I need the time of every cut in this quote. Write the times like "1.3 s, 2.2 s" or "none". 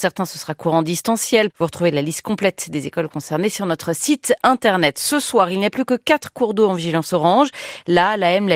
1.5 s